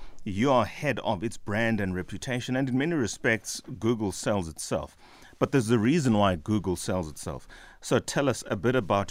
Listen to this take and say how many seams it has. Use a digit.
0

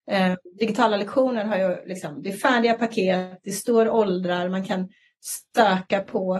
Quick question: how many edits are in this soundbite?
0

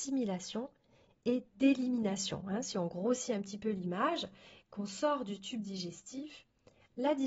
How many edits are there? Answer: 0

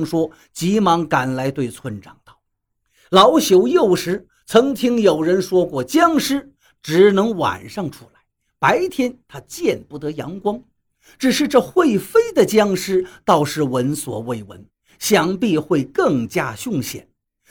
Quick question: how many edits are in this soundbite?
0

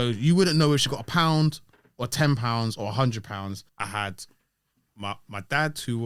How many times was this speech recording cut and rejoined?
1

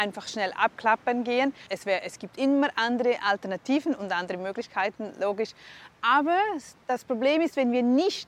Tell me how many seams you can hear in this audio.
1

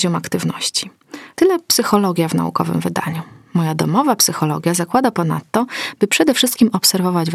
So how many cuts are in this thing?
1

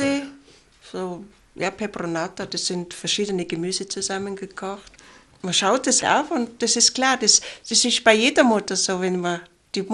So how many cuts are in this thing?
1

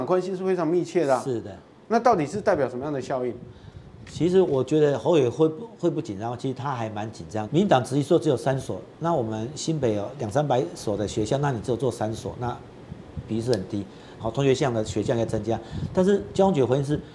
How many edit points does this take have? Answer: 3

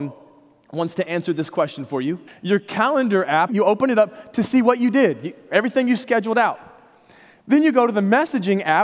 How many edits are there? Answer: 2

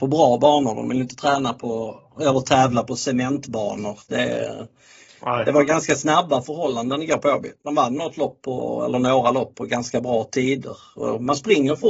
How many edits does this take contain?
0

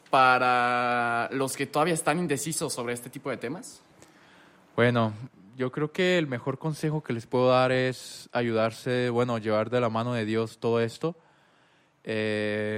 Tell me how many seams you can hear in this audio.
0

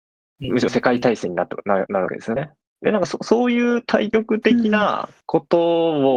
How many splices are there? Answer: 1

